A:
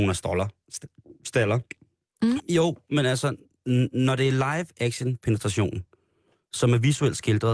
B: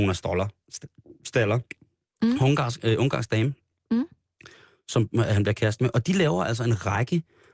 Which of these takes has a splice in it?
A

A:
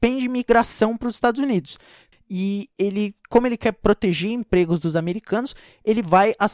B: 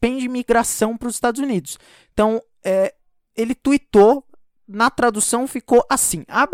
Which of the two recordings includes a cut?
A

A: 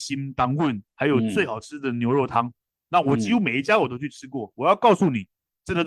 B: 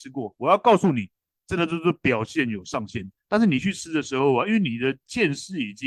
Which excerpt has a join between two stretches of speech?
B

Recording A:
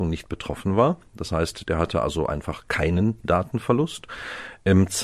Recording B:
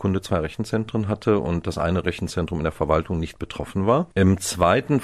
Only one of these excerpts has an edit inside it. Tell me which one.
B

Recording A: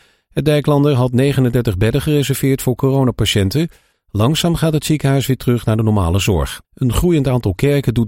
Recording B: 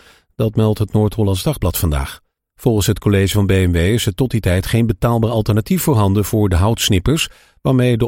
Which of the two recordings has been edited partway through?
A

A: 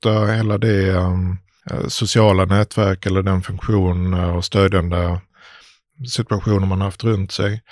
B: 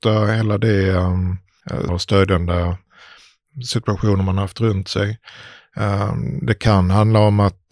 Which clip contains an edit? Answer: B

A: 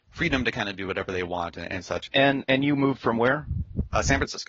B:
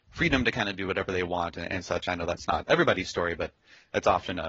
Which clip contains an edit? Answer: A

